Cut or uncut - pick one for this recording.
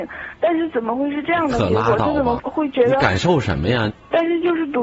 cut